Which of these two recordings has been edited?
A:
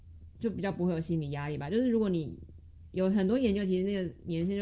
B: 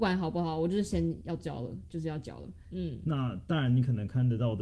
B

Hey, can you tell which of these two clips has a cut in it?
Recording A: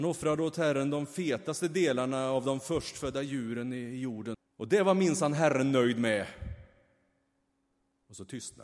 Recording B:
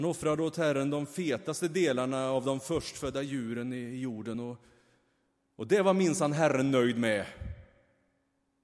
A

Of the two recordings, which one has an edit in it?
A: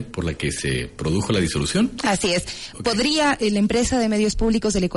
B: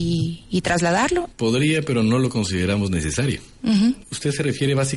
B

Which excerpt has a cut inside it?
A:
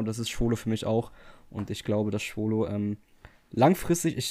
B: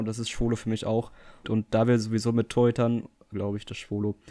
B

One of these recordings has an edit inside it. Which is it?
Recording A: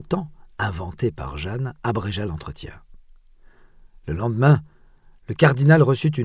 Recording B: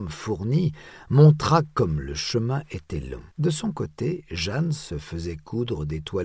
B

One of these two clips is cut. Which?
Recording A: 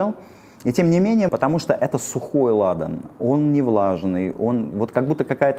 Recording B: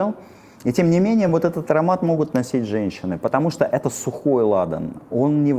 A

